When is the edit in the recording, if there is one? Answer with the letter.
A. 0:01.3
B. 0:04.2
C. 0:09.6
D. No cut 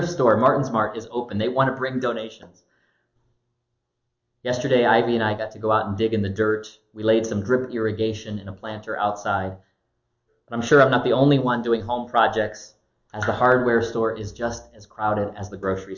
B